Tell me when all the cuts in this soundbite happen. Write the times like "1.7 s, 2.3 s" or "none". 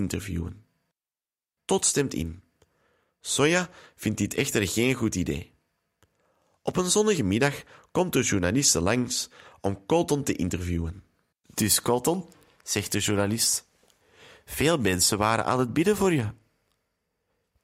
11.3 s

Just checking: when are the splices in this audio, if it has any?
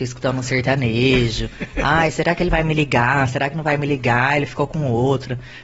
none

